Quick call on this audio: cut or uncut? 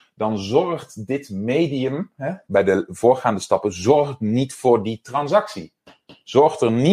uncut